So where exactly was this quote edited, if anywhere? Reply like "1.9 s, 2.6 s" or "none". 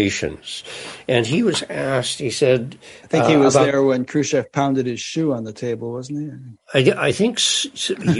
none